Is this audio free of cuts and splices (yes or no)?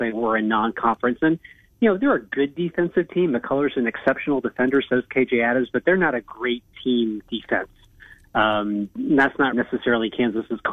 no